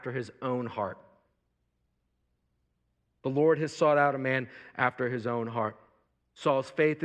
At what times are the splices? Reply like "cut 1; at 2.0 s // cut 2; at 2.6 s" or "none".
none